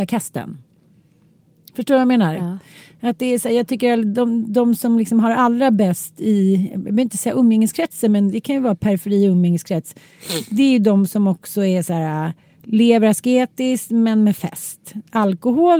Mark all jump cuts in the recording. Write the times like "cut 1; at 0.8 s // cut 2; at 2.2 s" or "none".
none